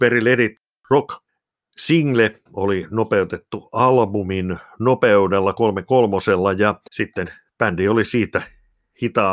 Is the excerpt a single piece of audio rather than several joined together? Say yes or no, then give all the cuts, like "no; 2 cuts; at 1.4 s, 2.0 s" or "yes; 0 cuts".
no; 2 cuts; at 2.5 s, 6.9 s